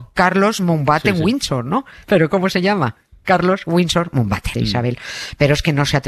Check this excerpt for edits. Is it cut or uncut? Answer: cut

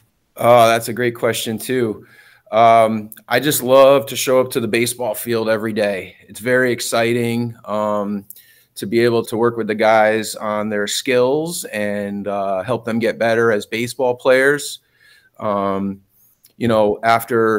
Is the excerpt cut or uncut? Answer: cut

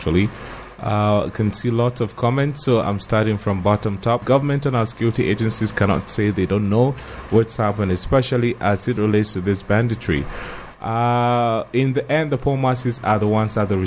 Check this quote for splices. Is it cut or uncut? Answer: cut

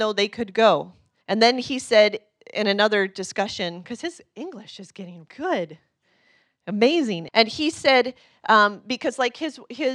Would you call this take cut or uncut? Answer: cut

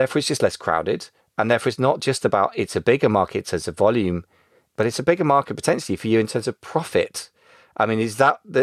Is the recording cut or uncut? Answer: uncut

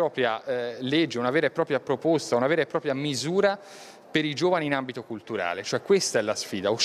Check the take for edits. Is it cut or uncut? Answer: uncut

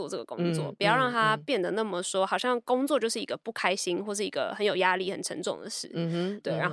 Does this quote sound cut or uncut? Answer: uncut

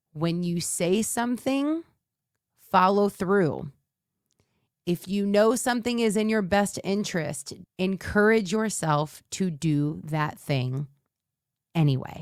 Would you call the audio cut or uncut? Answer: cut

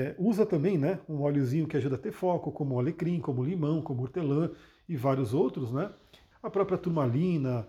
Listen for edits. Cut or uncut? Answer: cut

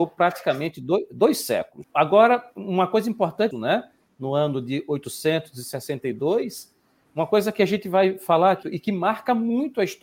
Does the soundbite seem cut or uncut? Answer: cut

